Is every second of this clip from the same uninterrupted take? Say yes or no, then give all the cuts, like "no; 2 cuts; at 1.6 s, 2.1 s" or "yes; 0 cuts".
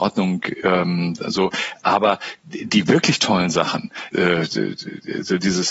no; 1 cut; at 4.1 s